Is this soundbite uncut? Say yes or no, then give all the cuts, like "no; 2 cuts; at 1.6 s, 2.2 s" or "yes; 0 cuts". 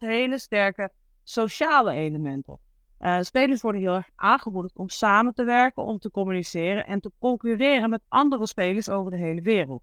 yes; 0 cuts